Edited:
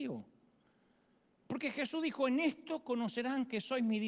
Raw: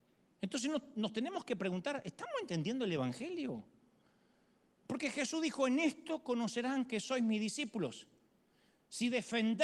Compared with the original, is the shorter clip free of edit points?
yes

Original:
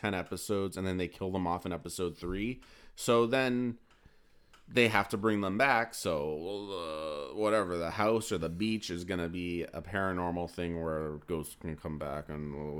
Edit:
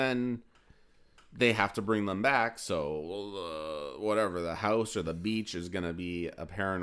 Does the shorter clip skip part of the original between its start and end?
no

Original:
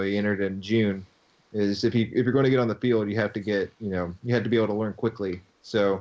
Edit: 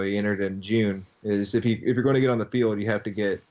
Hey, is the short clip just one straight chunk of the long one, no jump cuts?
no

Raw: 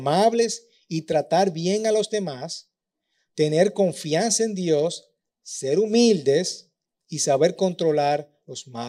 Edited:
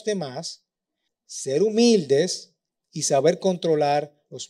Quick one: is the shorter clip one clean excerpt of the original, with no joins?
no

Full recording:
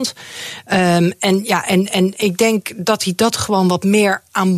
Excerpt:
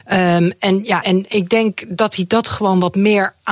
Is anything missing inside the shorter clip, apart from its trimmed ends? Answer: yes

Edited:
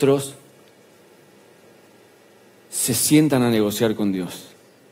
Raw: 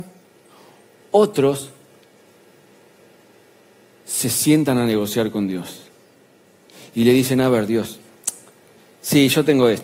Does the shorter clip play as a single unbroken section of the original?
yes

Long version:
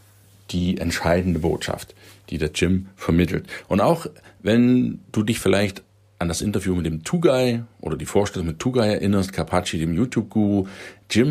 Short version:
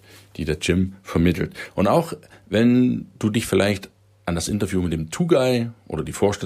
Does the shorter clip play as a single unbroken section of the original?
yes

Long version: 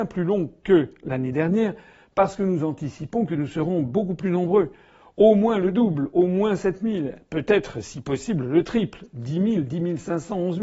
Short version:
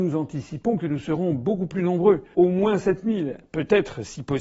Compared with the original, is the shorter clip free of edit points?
no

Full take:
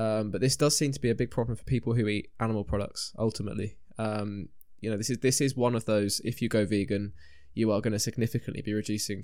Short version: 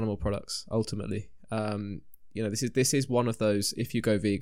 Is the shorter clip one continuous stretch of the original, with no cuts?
yes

